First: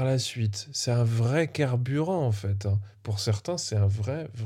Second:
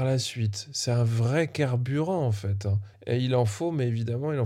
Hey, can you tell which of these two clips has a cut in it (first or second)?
second